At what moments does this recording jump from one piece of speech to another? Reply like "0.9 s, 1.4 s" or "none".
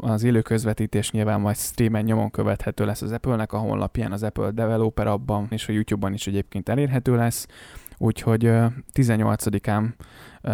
5.5 s

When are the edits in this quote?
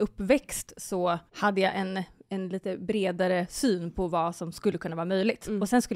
1.3 s

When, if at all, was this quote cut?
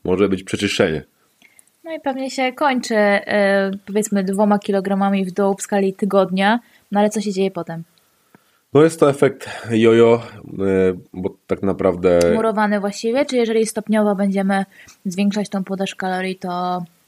none

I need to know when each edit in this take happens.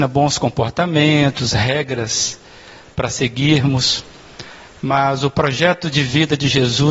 none

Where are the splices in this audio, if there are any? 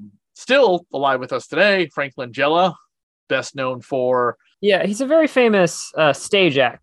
4.5 s

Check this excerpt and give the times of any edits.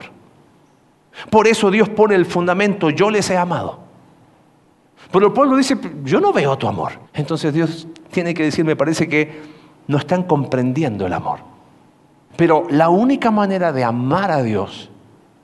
7.1 s, 12.3 s

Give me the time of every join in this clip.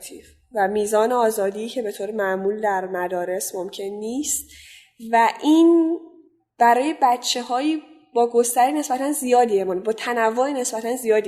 none

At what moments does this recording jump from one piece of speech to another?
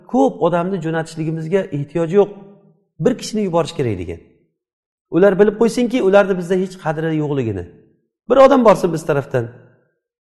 none

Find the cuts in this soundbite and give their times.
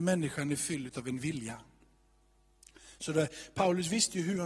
3.0 s

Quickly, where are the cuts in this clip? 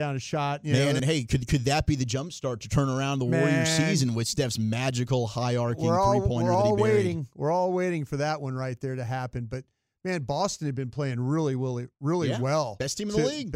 1.0 s

